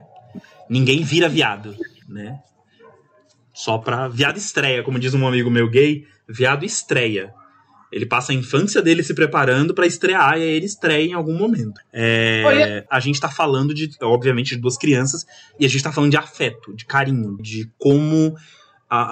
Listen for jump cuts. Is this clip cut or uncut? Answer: cut